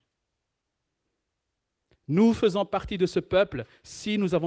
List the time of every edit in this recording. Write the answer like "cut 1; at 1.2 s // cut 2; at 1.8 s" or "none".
none